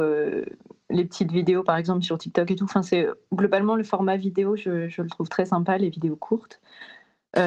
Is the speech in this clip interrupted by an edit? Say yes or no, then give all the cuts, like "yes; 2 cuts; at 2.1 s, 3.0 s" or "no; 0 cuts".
no; 0 cuts